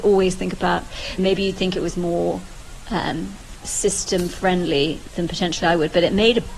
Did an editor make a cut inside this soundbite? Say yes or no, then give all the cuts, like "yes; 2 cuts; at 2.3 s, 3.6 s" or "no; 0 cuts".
yes; 1 cut; at 1.2 s